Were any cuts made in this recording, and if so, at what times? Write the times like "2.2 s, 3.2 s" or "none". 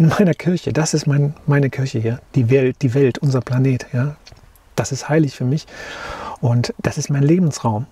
6.7 s